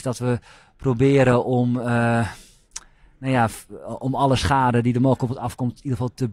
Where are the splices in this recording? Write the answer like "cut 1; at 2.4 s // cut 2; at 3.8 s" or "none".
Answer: none